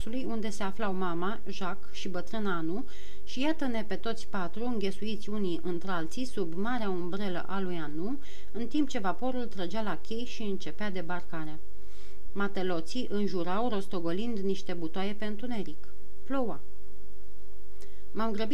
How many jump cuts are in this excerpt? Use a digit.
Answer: 1